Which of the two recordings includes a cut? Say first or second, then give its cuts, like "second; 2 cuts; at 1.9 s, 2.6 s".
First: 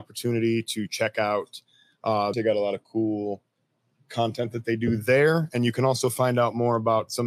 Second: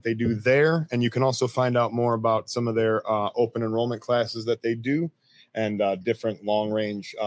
first; 1 cut; at 2.3 s